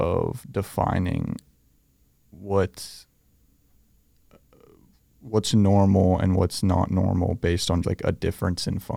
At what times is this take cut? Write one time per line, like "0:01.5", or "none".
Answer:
0:07.8

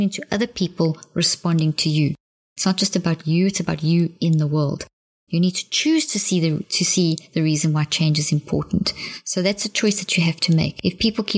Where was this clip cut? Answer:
0:05.3

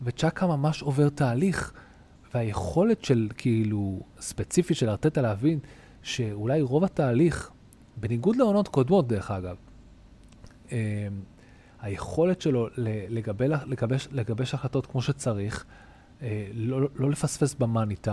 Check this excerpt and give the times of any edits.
none

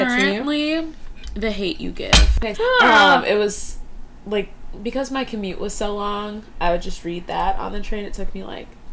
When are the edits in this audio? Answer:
0:02.5

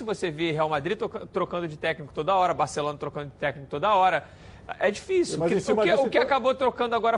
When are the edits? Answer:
none

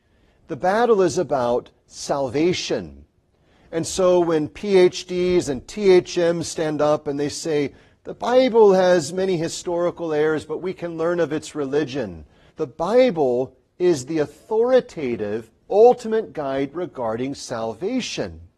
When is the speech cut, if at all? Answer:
0:12.5

